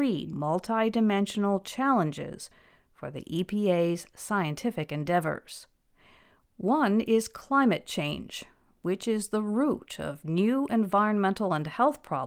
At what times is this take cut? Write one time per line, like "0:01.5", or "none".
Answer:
none